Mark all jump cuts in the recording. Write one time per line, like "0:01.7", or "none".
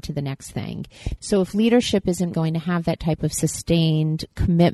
0:01.2
0:02.3